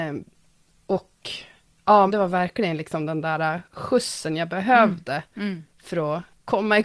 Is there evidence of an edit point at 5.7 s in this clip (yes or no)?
no